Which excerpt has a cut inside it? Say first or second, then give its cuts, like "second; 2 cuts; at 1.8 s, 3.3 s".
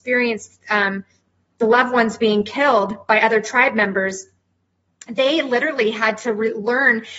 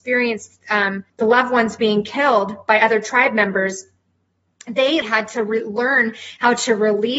second; 2 cuts; at 1.1 s, 5.0 s